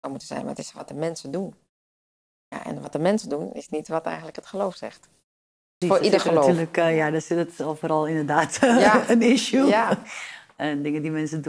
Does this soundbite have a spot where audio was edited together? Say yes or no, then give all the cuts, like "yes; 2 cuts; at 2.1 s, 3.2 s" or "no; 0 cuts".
yes; 1 cut; at 5.8 s